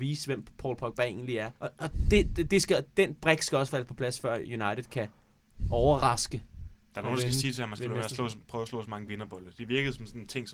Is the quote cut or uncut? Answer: cut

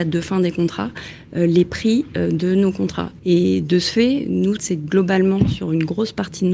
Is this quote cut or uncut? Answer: cut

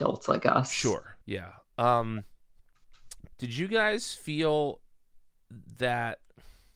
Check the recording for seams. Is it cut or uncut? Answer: cut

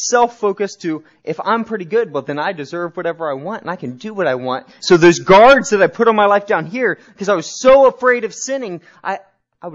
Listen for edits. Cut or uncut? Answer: cut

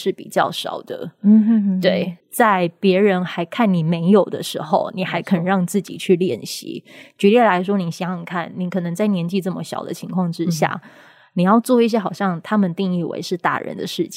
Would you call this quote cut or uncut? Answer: cut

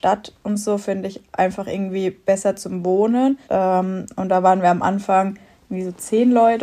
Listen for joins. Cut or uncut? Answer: cut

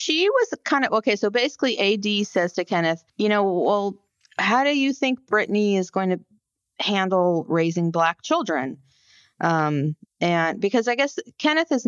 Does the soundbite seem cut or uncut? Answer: cut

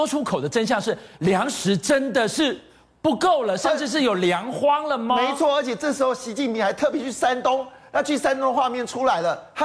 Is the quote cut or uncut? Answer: uncut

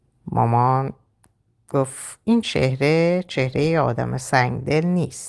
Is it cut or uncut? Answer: uncut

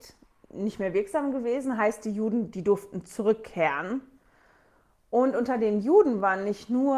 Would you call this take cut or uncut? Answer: uncut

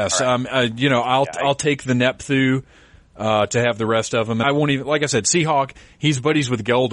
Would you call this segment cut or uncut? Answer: cut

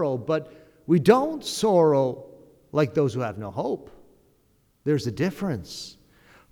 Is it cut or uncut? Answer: uncut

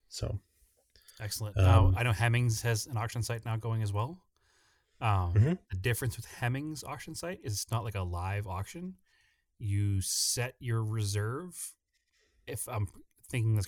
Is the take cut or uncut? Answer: uncut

